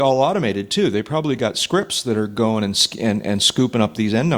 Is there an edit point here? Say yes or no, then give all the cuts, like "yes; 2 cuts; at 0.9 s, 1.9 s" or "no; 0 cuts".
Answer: no; 0 cuts